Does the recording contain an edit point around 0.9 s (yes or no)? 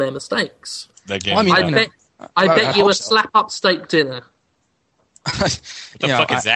yes